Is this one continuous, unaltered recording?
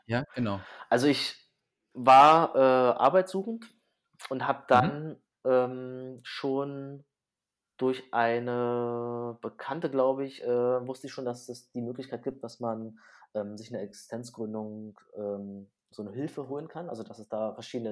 yes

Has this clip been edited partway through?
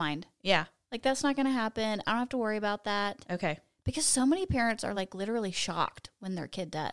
no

